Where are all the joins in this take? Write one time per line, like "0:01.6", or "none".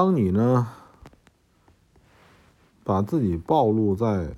none

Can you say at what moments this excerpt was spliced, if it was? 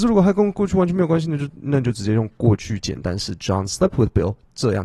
0:01.6

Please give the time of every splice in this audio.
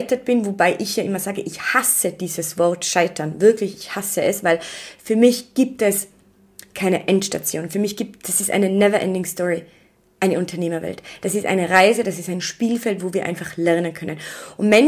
none

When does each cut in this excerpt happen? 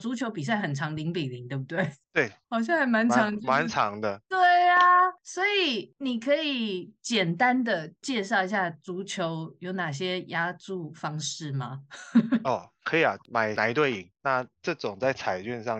0:13.2

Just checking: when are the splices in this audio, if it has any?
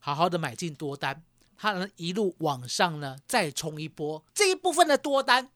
0:01.5
0:04.3

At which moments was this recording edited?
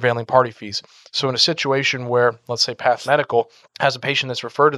0:03.7

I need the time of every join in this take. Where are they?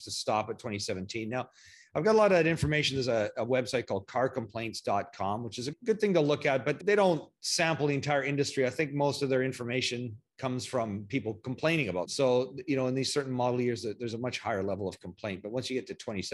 none

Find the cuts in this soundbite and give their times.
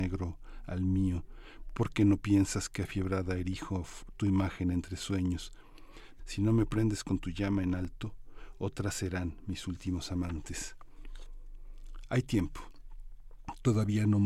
0:06.2

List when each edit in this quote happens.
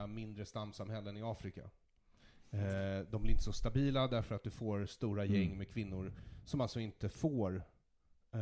none

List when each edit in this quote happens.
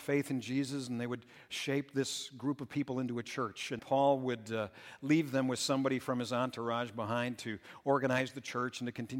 0:03.8

